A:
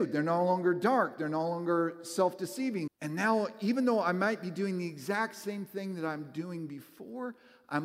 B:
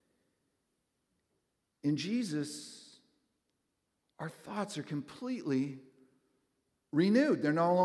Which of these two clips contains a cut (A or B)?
A